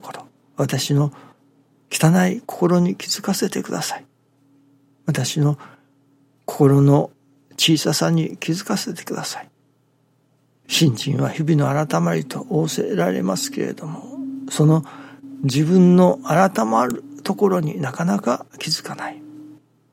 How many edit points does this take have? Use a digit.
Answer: 1